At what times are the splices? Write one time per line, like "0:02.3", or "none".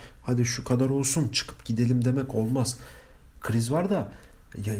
none